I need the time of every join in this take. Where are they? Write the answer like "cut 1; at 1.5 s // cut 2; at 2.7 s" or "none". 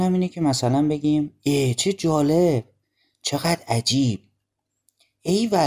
none